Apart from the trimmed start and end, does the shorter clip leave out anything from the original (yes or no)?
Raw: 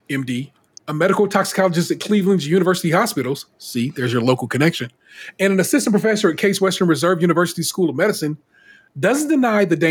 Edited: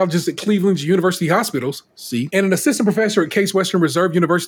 yes